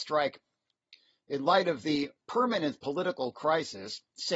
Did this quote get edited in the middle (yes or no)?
no